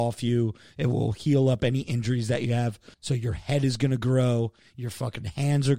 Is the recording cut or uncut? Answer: cut